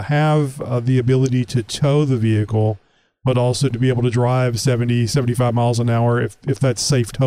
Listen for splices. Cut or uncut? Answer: cut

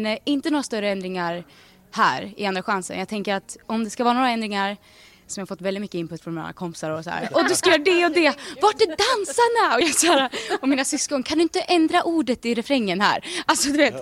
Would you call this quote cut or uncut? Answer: uncut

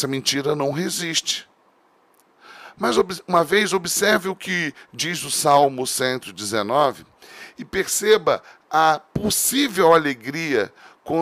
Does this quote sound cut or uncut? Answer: uncut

